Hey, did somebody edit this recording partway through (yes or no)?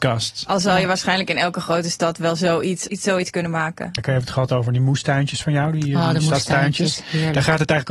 yes